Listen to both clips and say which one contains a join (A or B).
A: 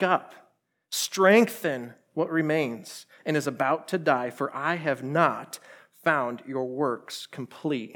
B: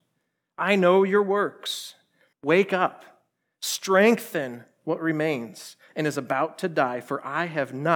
B